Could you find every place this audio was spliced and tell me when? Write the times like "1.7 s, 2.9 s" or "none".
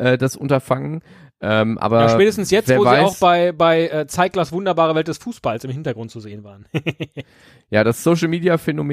none